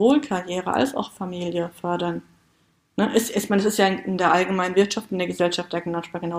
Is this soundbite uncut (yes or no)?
yes